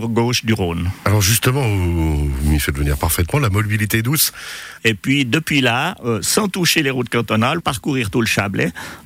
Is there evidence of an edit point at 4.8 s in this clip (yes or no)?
yes